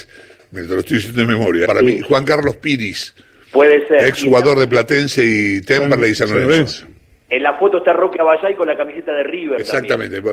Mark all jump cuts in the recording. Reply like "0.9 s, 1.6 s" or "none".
1.6 s